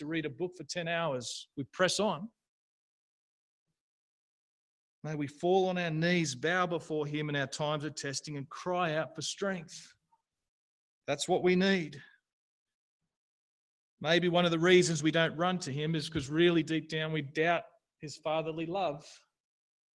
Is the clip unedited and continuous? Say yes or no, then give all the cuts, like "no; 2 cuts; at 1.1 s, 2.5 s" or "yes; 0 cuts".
yes; 0 cuts